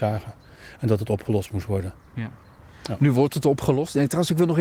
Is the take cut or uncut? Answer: uncut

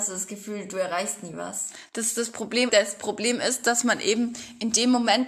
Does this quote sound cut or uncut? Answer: cut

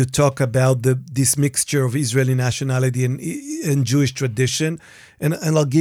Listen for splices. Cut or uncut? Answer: uncut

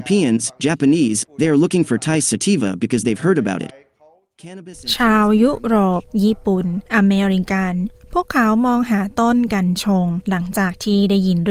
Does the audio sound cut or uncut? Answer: cut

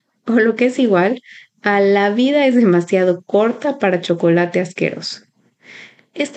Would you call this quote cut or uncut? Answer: uncut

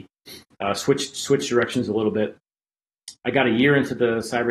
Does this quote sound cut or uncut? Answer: cut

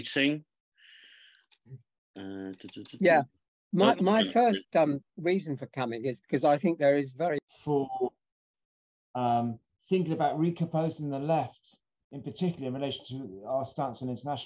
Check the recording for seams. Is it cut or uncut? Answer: uncut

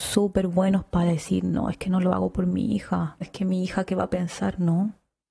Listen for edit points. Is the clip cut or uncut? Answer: cut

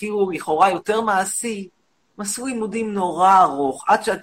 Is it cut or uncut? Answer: uncut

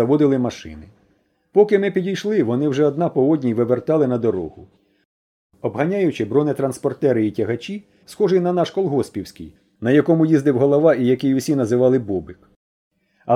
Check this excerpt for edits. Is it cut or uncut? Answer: cut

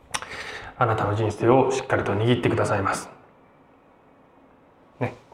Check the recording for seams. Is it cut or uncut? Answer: uncut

